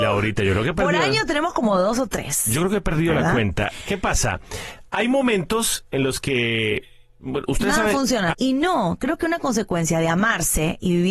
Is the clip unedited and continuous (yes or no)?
no